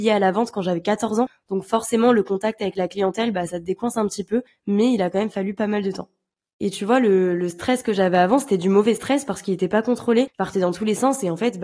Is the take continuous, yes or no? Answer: yes